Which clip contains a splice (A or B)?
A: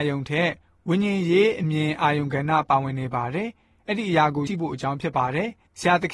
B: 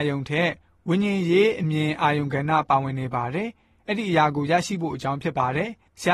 A